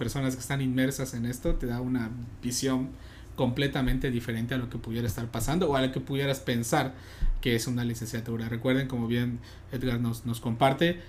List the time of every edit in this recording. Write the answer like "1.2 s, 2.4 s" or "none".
none